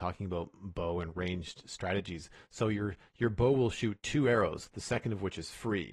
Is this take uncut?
no; 1 cut; at 4.7 s

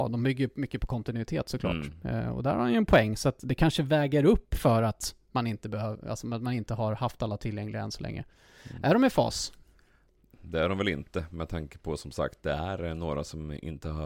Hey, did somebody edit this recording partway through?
no; 0 cuts

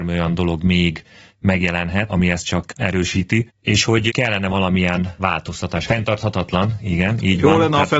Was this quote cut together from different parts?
yes; 2 cuts; at 2.1 s, 5.9 s

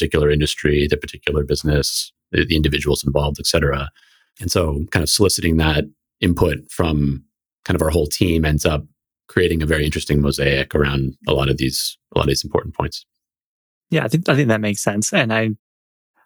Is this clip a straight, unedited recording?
no; 1 cut; at 4.3 s

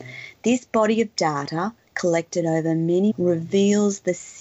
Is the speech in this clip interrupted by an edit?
yes; 1 cut; at 3.1 s

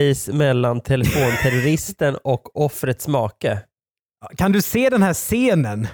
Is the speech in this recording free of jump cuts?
yes; 0 cuts

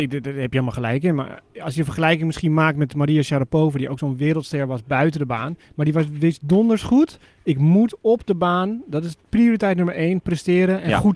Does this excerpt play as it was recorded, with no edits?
yes; 0 cuts

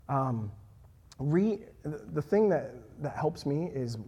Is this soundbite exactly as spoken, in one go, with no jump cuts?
yes; 0 cuts

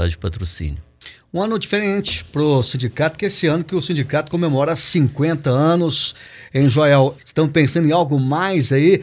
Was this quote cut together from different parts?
yes; 1 cut; at 7.2 s

